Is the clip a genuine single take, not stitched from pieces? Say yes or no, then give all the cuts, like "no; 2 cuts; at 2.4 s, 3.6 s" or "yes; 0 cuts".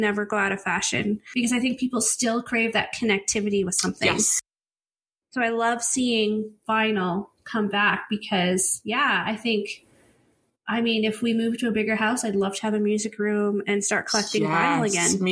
yes; 0 cuts